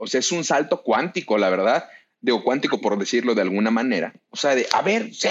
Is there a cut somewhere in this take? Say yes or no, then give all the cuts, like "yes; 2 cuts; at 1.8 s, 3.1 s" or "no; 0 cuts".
yes; 1 cut; at 4.3 s